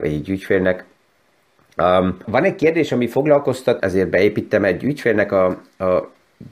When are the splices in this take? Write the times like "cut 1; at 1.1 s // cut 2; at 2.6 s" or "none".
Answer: cut 1; at 2.2 s // cut 2; at 3.8 s